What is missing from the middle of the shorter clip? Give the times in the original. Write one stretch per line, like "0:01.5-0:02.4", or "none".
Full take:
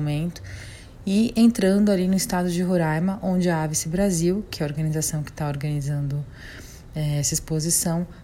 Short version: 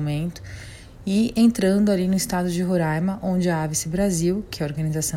none